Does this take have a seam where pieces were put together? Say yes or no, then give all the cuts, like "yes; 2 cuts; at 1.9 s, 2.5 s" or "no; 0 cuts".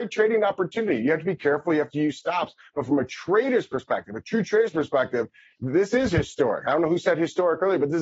no; 0 cuts